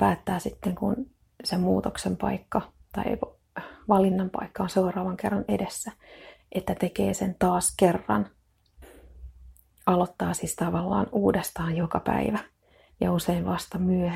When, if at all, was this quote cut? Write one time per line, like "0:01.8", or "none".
0:12.9